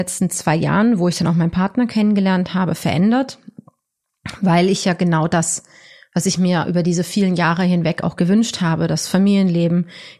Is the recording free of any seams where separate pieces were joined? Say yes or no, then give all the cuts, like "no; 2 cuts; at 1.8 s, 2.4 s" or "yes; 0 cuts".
yes; 0 cuts